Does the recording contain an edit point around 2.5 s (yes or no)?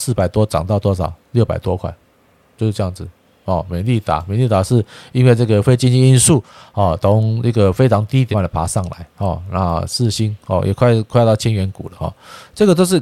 no